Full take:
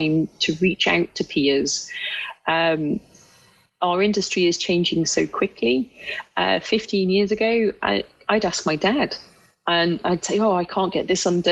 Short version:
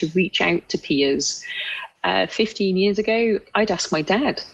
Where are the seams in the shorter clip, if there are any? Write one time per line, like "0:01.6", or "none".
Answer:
0:01.9
0:03.4